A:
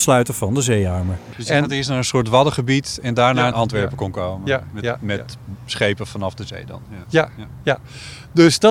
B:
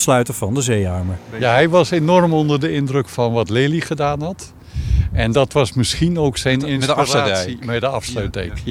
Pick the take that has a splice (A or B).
A